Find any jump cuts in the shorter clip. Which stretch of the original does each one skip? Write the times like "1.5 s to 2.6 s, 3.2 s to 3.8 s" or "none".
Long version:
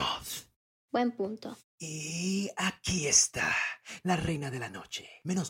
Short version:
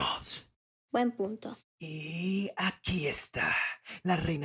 none